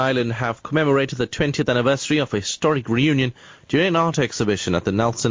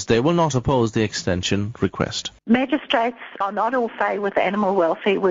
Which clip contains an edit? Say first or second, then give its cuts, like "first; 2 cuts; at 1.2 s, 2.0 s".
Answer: second; 2 cuts; at 2.4 s, 3.4 s